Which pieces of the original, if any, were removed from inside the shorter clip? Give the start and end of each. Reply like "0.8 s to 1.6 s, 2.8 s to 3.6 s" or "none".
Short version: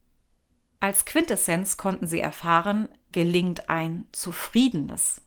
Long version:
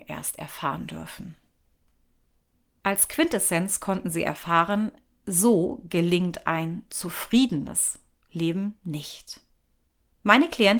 5.1 s to 5.9 s